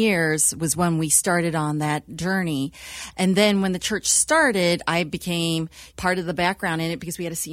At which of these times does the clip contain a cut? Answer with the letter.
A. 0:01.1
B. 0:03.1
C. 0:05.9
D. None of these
C